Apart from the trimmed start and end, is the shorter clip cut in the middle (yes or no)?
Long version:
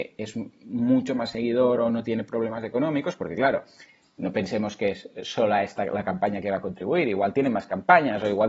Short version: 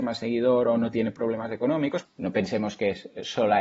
yes